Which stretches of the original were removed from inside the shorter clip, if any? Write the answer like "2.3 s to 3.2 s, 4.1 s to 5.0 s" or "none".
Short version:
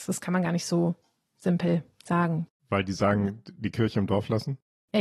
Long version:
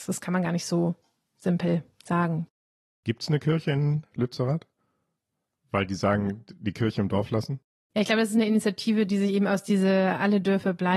2.6 s to 5.6 s